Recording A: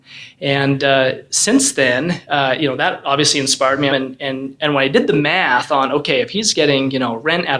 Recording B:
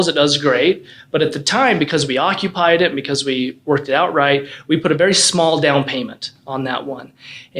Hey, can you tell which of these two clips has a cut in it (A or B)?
A